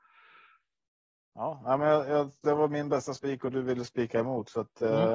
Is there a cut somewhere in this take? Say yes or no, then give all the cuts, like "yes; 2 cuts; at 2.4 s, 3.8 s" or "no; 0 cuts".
no; 0 cuts